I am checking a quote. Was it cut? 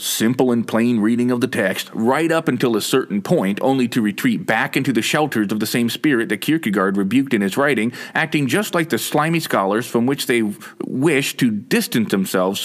no; 0 cuts

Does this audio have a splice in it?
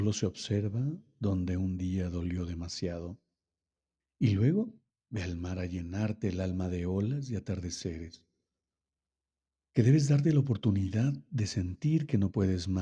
yes; 2 cuts; at 4.0 s, 9.6 s

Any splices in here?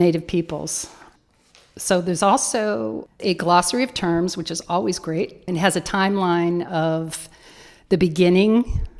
no; 0 cuts

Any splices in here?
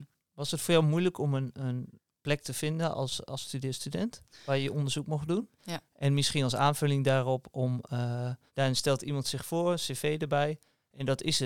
yes; 2 cuts; at 5.6 s, 8.5 s

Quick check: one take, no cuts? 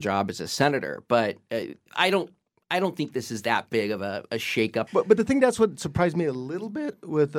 no; 2 cuts; at 1.9 s, 4.9 s

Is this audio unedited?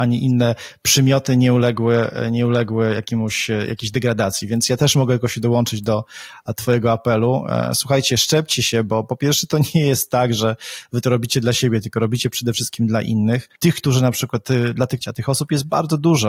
no; 2 cuts; at 13.6 s, 15.0 s

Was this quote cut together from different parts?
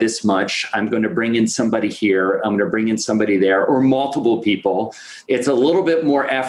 yes; 1 cut; at 5.2 s

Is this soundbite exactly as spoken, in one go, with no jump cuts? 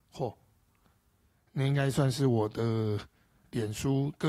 yes; 0 cuts

